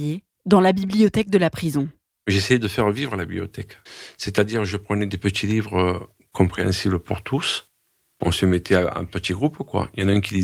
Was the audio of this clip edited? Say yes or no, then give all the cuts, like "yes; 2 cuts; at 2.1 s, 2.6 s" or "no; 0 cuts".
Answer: no; 0 cuts